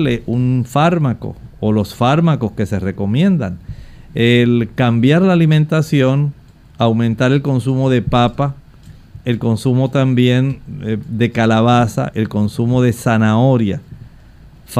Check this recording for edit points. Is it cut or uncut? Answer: cut